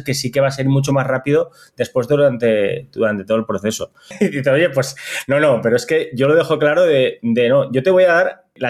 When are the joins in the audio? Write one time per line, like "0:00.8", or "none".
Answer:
0:04.1